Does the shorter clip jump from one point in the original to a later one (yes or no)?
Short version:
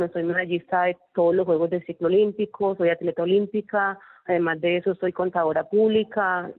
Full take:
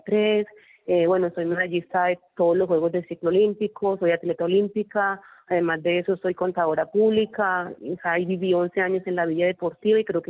no